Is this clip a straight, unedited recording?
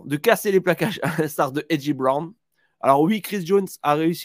yes; 0 cuts

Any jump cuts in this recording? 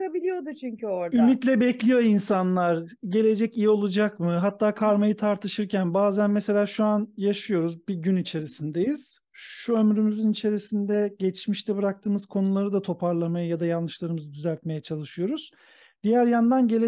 no; 0 cuts

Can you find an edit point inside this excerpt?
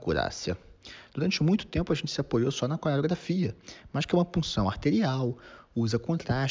yes; 1 cut; at 1.1 s

